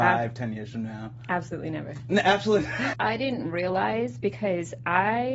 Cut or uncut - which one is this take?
cut